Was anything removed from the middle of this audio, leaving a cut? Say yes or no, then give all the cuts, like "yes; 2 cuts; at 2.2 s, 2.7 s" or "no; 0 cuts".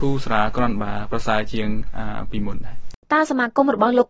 yes; 1 cut; at 3.0 s